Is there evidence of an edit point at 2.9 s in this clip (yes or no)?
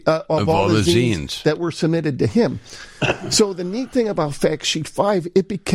no